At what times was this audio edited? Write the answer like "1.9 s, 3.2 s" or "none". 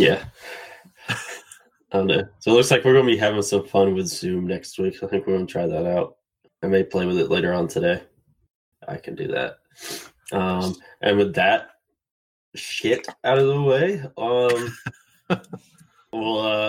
6.5 s, 8.7 s